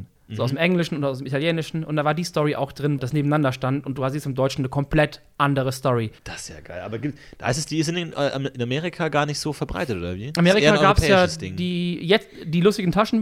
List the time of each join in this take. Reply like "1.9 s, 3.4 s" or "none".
3.0 s, 6.2 s